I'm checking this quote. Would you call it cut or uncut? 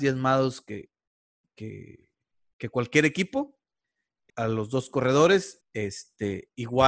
cut